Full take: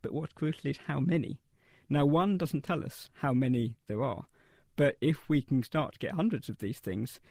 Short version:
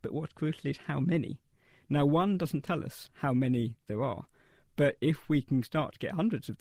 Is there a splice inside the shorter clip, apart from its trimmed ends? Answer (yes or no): no